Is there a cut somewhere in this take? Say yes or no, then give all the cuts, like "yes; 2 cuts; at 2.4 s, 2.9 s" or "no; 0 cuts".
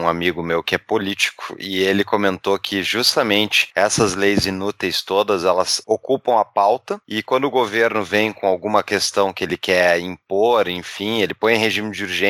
no; 0 cuts